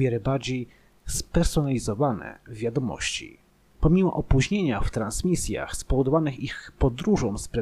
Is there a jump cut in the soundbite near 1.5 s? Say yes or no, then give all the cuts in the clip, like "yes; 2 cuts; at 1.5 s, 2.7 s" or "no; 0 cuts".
no; 1 cut; at 3.7 s